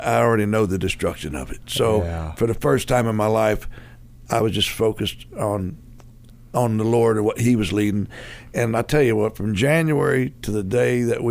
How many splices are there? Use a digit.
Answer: 0